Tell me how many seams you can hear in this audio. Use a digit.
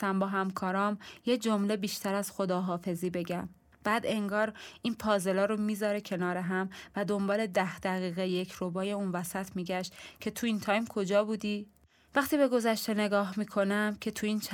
1